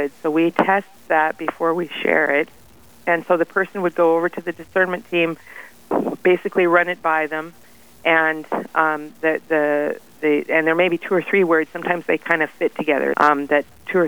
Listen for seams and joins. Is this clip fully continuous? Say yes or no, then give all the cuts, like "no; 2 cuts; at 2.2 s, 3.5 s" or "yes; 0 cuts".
no; 1 cut; at 13.1 s